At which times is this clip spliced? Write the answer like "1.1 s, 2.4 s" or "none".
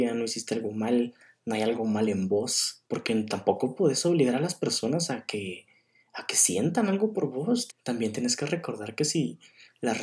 2.9 s, 7.7 s